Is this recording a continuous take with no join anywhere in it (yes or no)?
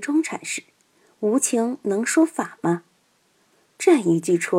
no